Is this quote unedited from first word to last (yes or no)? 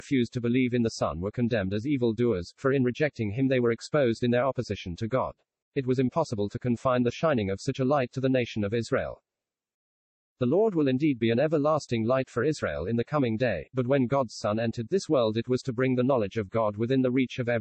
no